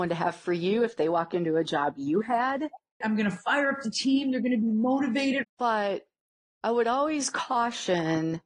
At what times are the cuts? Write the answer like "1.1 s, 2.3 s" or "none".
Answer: 3.0 s, 5.4 s